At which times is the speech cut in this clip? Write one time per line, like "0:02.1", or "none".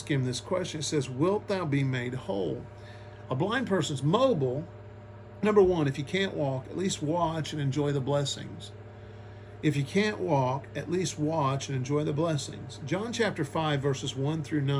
0:03.2
0:05.4